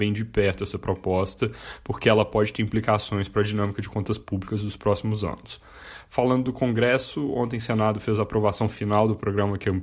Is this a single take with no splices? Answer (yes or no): yes